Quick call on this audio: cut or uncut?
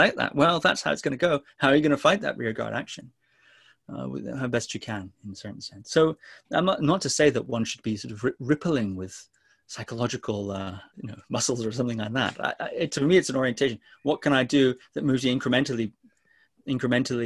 cut